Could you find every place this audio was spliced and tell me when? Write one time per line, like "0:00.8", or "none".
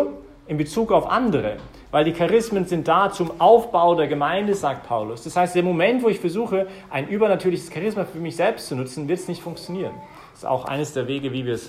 none